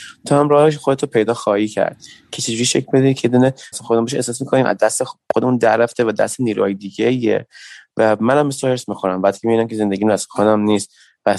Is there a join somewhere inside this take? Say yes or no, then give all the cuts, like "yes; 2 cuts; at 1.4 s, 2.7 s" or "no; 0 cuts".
yes; 1 cut; at 3.7 s